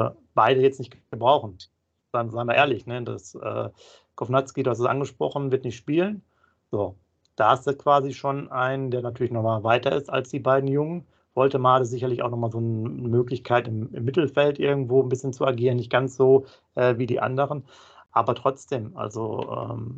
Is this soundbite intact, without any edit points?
yes; 0 cuts

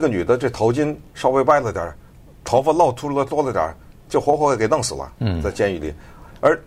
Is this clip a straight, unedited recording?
yes; 0 cuts

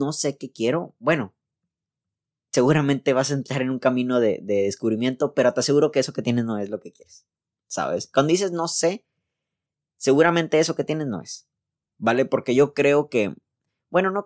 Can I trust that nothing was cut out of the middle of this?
yes; 0 cuts

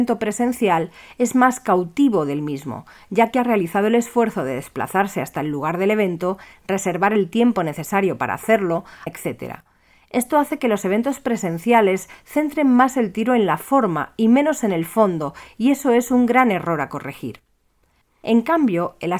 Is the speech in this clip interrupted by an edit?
yes; 2 cuts; at 9.1 s, 18.0 s

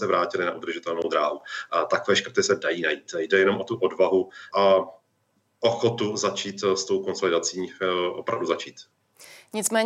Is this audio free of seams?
no; 1 cut; at 4.5 s

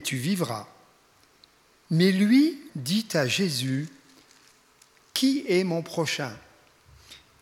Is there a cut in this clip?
yes; 1 cut; at 2.7 s

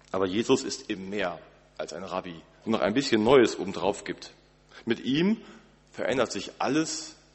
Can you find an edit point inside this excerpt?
yes; 1 cut; at 2.6 s

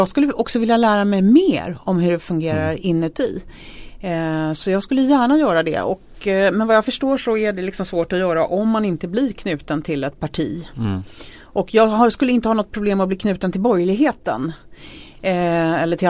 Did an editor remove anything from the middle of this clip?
no; 0 cuts

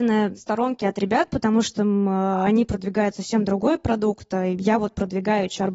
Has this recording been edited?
no; 0 cuts

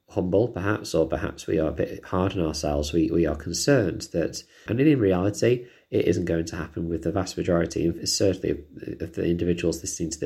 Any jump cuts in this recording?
yes; 1 cut; at 4.7 s

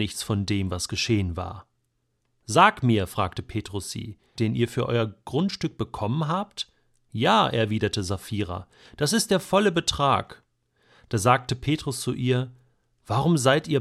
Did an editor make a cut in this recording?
yes; 1 cut; at 4.4 s

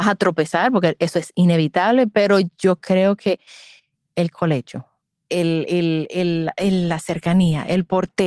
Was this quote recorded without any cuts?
yes; 0 cuts

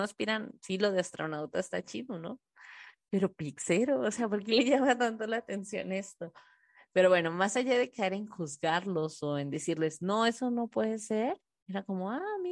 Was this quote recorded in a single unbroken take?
yes; 0 cuts

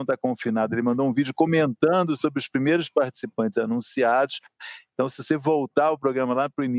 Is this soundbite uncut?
yes; 0 cuts

